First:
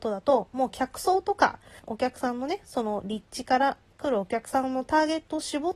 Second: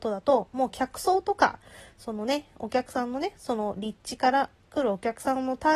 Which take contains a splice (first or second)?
first